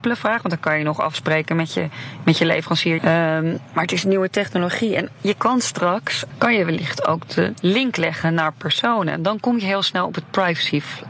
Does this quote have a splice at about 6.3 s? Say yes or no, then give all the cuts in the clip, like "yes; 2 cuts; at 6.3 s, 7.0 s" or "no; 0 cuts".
yes; 2 cuts; at 3.0 s, 6.3 s